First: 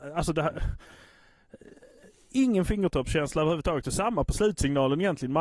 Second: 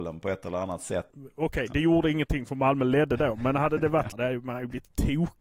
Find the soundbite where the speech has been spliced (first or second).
second